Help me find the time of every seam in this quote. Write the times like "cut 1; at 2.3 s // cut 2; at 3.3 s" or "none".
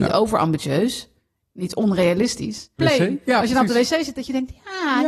cut 1; at 2.8 s